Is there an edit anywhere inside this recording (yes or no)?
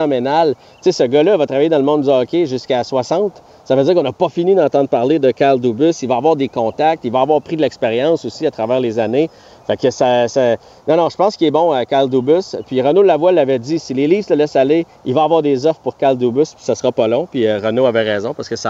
no